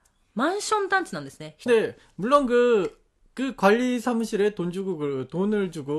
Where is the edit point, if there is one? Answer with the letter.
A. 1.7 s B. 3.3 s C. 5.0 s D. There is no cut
A